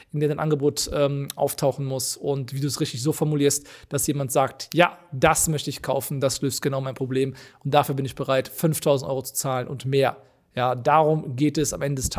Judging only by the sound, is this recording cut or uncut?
uncut